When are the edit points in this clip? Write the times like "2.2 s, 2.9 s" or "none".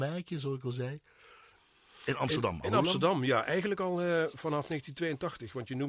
none

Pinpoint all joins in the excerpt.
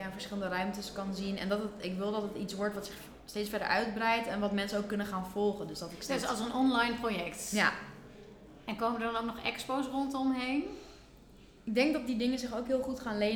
none

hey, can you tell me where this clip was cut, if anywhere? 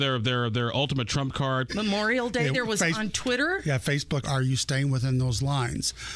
1.7 s, 4.2 s

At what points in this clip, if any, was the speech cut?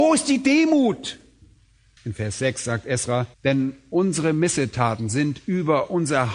2.0 s, 3.3 s

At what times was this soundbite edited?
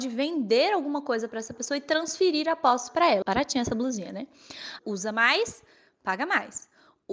3.2 s, 4.8 s

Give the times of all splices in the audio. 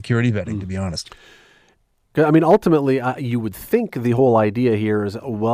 2.1 s

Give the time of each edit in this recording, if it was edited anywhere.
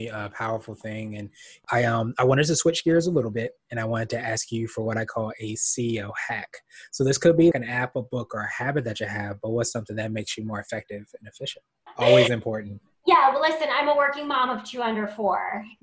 7.5 s, 11.9 s

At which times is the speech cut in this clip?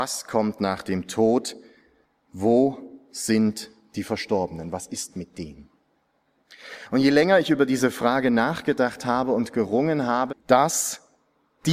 10.3 s

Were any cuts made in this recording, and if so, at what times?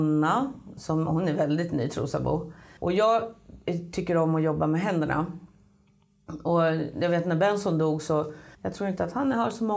2.8 s, 8.5 s

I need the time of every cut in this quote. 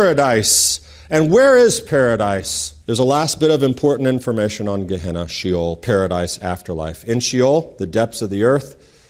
2.8 s

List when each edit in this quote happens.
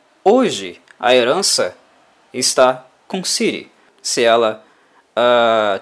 3.9 s

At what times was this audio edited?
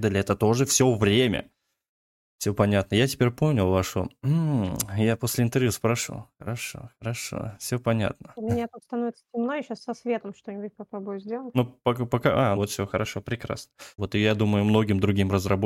12.6 s, 14.0 s

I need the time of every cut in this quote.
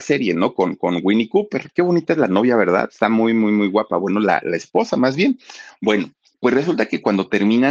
1.7 s

